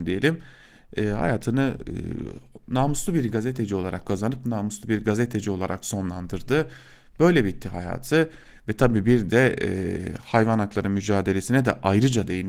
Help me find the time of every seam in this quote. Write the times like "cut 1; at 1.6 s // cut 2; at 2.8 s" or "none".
none